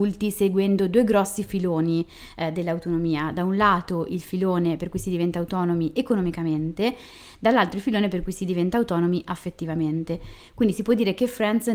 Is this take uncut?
yes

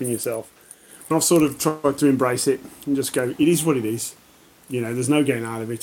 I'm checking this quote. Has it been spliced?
yes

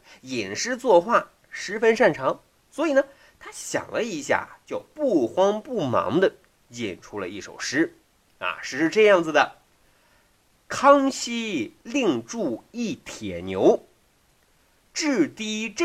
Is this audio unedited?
yes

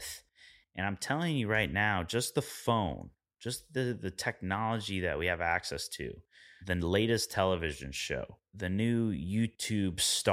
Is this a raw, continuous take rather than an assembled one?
yes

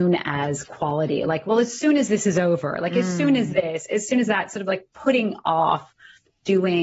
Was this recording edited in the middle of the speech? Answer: no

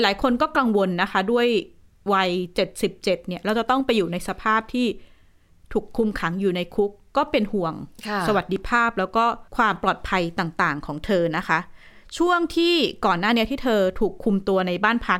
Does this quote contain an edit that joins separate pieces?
yes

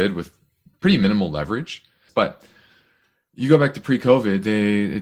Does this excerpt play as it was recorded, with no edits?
no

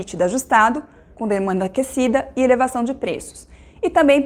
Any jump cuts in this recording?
yes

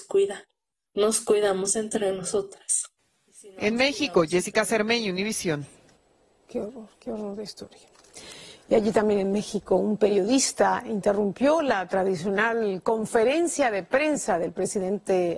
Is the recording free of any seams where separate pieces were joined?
yes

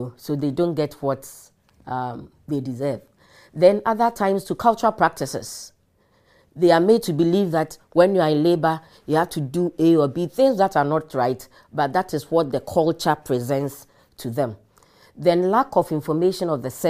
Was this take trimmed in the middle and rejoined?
no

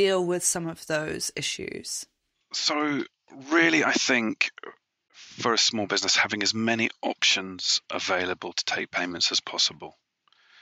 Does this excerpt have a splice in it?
no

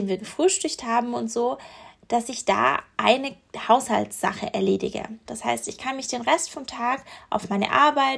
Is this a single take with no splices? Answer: no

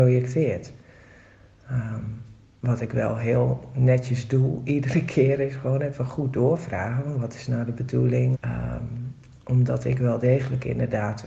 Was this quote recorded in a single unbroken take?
no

